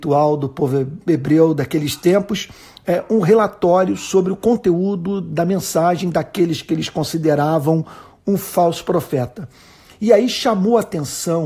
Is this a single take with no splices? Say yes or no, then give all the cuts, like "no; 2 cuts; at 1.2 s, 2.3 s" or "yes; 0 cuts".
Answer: yes; 0 cuts